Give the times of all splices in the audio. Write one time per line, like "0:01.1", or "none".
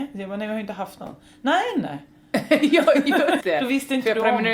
0:03.4